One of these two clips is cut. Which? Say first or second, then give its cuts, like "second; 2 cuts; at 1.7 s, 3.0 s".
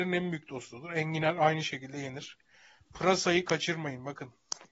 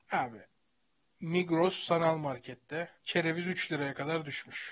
second; 1 cut; at 3.0 s